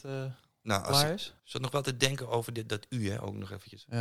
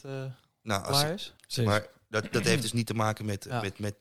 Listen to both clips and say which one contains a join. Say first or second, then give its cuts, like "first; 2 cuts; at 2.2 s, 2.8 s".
second; 1 cut; at 1.4 s